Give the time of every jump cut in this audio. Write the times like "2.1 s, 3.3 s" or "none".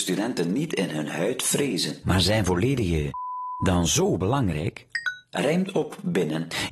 2.0 s